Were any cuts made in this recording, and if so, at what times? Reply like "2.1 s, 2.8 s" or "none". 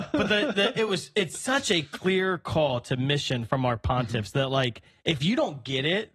none